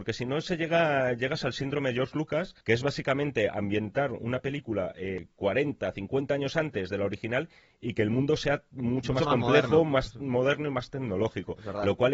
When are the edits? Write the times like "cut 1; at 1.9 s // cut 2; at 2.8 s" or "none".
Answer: cut 1; at 2.6 s